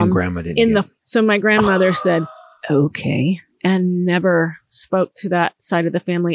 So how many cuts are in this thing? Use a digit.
1